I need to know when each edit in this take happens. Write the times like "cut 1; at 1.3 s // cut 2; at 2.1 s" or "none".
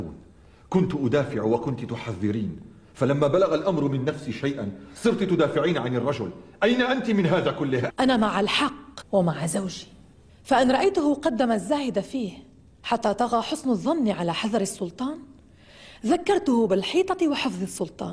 cut 1; at 7.9 s